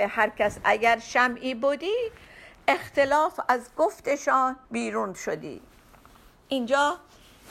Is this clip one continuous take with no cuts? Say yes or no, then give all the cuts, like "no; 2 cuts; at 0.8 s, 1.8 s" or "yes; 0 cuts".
no; 1 cut; at 4.6 s